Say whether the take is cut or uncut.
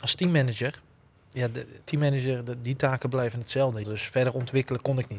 cut